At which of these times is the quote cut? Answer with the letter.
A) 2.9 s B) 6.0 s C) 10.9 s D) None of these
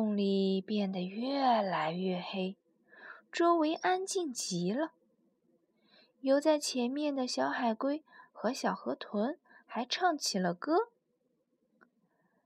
D